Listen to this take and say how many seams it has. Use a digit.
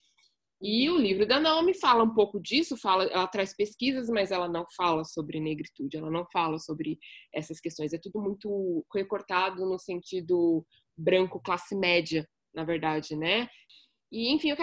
0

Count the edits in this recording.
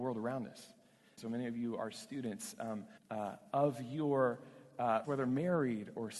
3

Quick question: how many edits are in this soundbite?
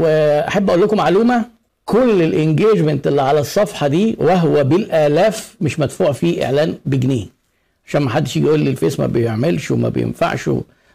0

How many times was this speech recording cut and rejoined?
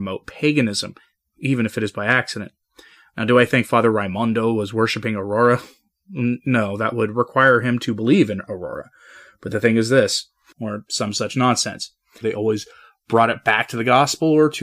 2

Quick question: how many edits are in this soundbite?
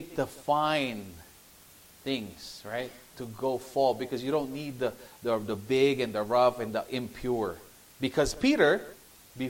1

